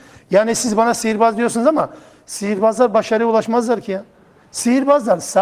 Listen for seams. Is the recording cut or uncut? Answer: uncut